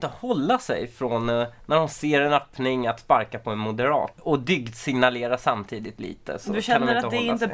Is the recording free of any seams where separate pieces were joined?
no; 1 cut; at 4.1 s

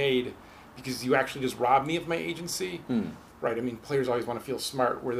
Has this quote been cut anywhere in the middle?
yes; 1 cut; at 3.3 s

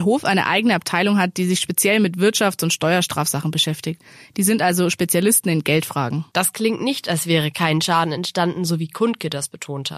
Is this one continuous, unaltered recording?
no; 1 cut; at 6.3 s

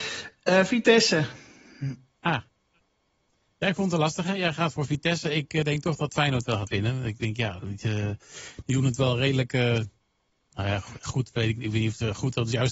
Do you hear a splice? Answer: no; 0 cuts

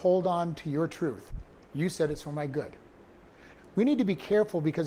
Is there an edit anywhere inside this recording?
yes; 1 cut; at 3.6 s

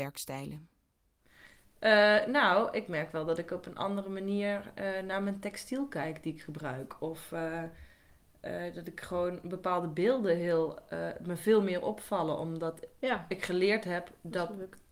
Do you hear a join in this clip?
no; 0 cuts

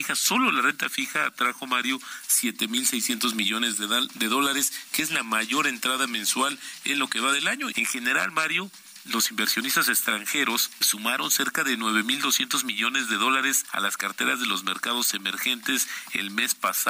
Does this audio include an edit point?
yes; 2 cuts; at 7.7 s, 10.8 s

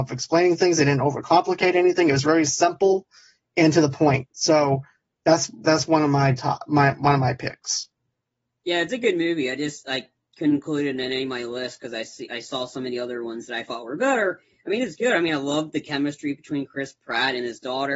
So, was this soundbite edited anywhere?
no; 0 cuts

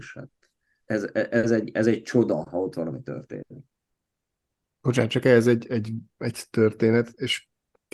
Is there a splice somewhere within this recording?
no; 0 cuts

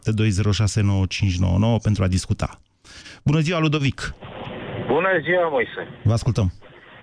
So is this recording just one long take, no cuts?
yes; 0 cuts

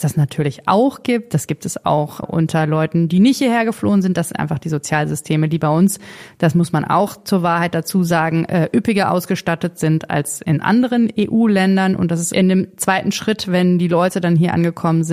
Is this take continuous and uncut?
no; 1 cut; at 2.2 s

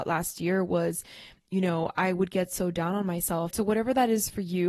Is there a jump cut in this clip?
yes; 1 cut; at 3.5 s

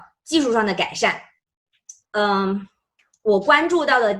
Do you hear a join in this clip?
yes; 1 cut; at 2.0 s

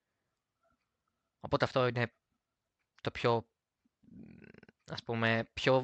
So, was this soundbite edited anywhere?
no; 0 cuts

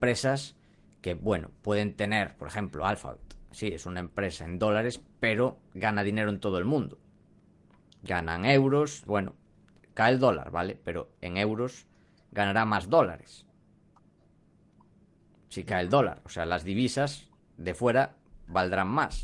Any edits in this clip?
yes; 1 cut; at 9.1 s

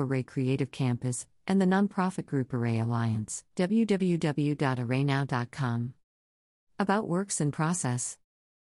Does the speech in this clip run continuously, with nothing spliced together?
no; 1 cut; at 3.5 s

